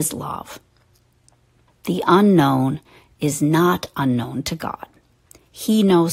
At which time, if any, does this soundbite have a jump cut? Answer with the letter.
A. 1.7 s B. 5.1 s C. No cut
A